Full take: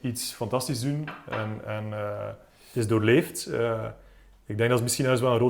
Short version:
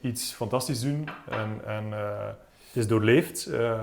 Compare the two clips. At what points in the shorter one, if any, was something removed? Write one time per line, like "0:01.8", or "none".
none